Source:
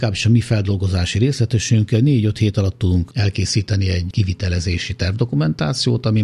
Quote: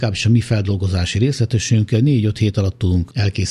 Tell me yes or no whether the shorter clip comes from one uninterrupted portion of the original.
yes